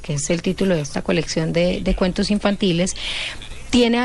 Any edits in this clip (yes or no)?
no